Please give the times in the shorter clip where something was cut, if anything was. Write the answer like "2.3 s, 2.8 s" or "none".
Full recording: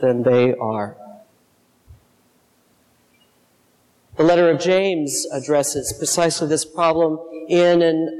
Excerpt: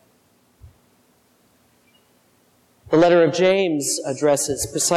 none